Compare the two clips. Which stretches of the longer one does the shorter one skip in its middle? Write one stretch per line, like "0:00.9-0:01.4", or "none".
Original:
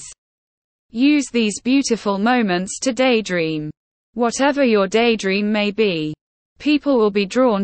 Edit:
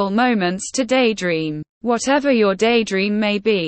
0:03.8-0:04.0